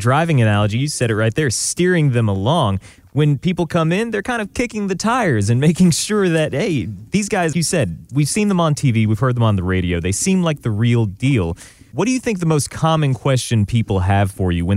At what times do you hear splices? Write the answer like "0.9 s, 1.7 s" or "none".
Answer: 7.5 s